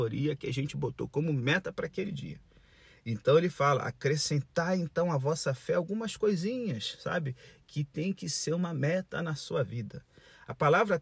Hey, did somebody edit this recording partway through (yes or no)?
no